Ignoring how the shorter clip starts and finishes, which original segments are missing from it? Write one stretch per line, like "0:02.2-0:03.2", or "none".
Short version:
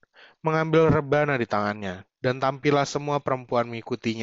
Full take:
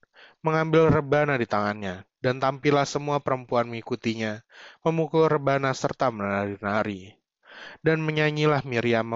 none